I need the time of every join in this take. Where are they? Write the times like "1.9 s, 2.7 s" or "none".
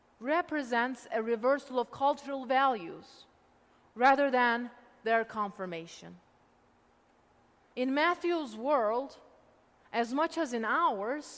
7.7 s